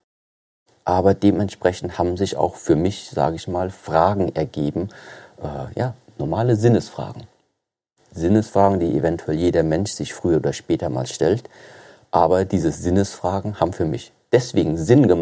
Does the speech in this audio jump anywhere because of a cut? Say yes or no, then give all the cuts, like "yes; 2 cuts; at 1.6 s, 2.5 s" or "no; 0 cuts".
no; 0 cuts